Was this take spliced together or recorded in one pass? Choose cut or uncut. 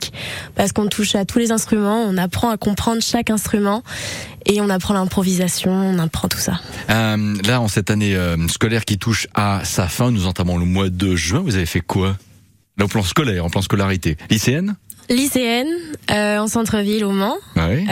uncut